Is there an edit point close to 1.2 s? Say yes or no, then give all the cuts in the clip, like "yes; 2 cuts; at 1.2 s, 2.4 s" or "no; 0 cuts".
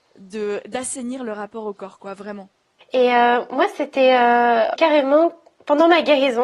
no; 2 cuts; at 2.8 s, 4.8 s